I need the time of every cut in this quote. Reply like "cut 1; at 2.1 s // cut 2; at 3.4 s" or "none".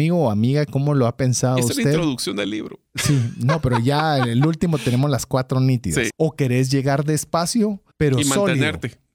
cut 1; at 6.1 s // cut 2; at 7.9 s